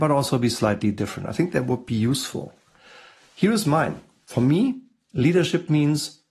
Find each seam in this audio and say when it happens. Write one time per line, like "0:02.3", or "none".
none